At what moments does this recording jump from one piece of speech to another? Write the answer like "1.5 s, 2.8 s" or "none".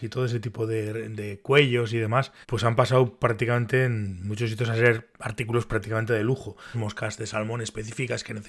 2.4 s, 6.7 s